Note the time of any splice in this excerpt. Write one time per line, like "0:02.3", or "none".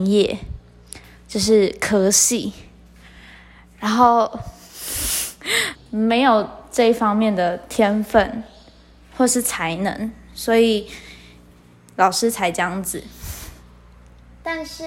0:05.7